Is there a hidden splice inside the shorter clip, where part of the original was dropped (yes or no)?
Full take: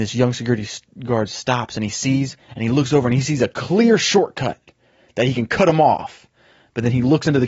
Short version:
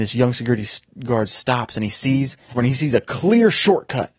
yes